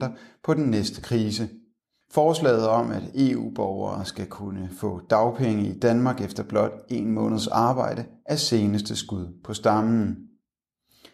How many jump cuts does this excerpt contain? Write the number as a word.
one